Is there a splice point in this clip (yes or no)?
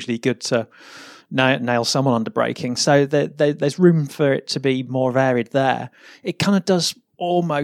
no